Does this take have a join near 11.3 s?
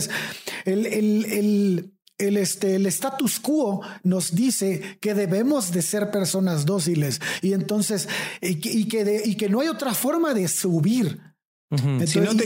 no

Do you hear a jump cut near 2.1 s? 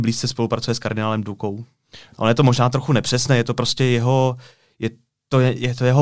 yes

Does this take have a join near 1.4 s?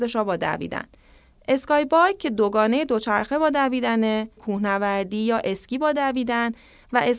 no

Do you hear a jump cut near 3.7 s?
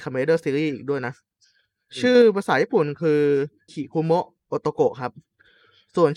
yes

